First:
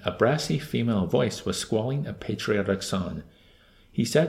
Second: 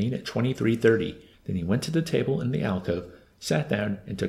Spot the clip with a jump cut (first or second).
second